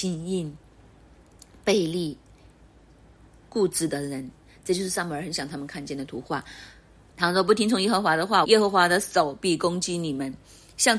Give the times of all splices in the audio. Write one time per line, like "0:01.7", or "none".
0:07.1
0:08.4